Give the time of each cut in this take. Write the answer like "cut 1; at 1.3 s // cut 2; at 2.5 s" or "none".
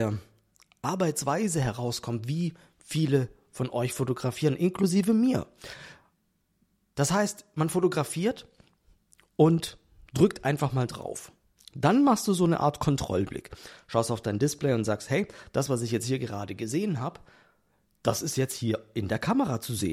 cut 1; at 11.6 s